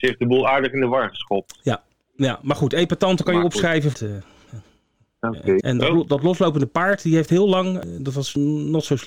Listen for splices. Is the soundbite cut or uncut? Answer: cut